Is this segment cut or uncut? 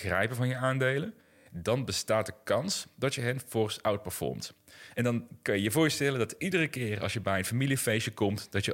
cut